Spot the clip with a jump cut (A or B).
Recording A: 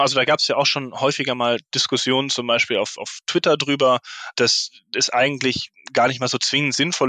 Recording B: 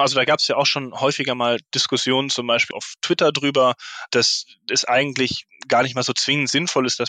B